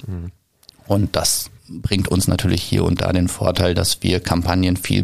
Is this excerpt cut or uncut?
cut